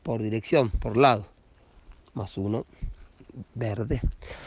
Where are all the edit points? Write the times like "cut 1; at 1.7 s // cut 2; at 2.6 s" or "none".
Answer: cut 1; at 2.0 s